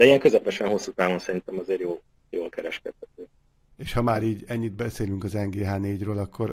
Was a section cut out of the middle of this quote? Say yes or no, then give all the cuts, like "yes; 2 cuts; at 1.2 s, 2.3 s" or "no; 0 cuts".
yes; 1 cut; at 3.7 s